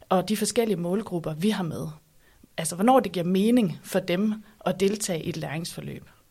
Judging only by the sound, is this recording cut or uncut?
uncut